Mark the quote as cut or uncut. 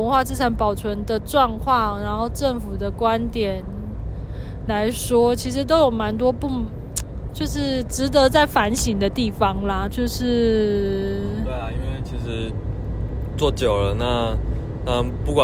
cut